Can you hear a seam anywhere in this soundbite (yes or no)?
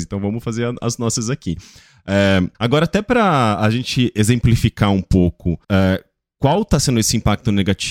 yes